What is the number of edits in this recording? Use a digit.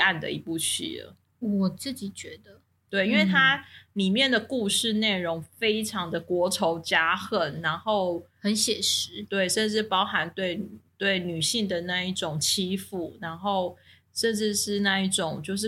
0